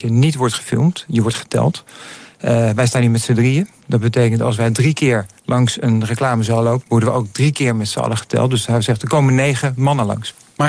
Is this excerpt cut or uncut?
cut